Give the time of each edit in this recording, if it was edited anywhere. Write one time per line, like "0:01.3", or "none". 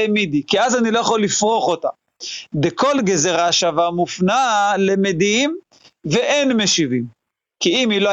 none